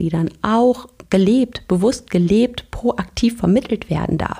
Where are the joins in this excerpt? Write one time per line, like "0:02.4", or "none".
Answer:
none